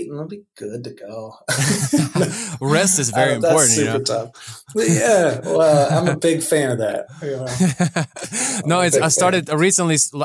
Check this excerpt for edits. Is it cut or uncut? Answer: uncut